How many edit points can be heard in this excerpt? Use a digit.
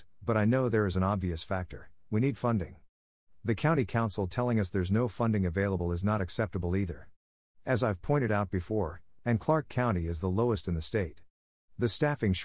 2